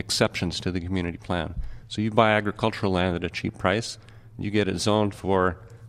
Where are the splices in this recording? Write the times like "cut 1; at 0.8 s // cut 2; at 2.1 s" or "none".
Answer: none